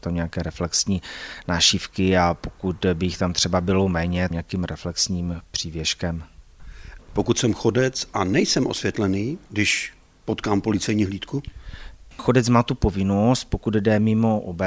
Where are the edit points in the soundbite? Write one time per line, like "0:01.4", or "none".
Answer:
0:04.3
0:07.0
0:09.5